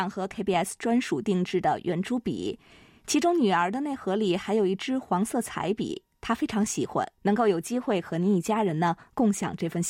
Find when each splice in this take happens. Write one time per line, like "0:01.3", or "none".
0:07.2